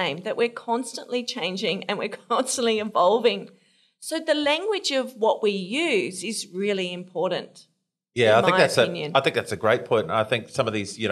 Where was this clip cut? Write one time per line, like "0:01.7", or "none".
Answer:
none